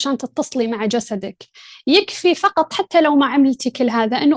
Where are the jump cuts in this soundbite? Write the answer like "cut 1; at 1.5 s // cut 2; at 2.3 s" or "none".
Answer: none